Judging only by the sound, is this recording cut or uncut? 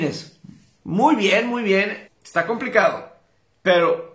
cut